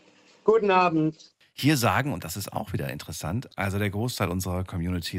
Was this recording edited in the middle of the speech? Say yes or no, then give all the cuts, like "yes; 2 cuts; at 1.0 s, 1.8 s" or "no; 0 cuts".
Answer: yes; 2 cuts; at 1.4 s, 3.5 s